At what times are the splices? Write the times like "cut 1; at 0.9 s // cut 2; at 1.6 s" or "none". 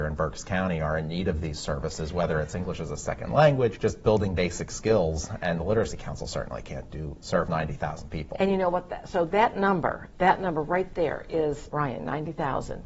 cut 1; at 3.8 s // cut 2; at 11.7 s